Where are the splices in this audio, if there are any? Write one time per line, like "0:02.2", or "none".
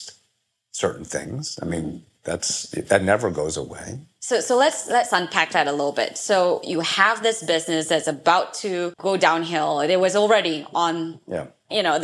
none